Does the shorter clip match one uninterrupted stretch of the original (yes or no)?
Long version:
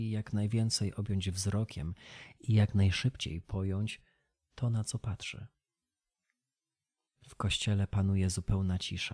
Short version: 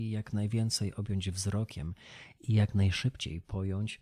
yes